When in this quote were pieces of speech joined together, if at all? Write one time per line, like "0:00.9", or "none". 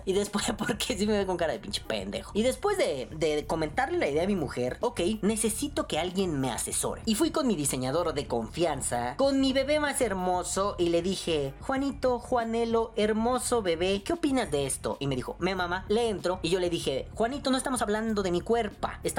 0:04.8